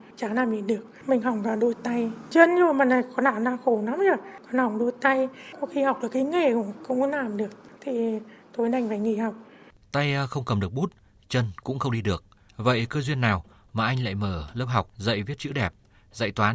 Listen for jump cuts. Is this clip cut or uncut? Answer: uncut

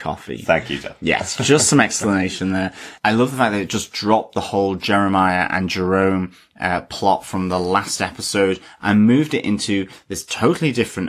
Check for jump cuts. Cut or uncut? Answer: uncut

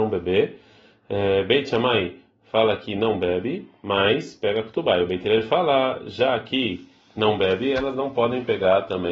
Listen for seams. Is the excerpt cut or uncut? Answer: uncut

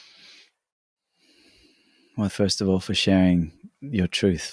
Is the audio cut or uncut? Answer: cut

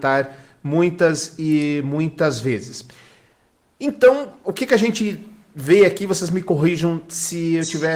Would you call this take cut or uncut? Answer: uncut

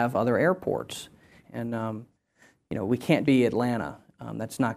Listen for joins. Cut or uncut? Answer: cut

